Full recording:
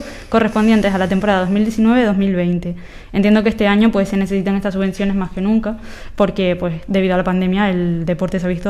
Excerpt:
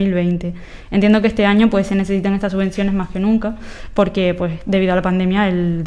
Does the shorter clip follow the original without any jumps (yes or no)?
yes